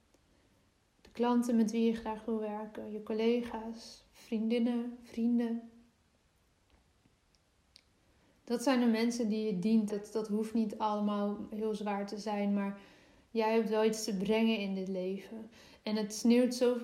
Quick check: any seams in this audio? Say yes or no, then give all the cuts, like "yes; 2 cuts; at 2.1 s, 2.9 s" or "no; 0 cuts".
yes; 1 cut; at 9.9 s